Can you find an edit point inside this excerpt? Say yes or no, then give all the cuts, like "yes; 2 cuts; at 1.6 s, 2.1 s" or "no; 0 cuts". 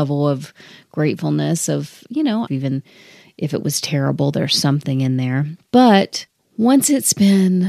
yes; 2 cuts; at 2.5 s, 5.6 s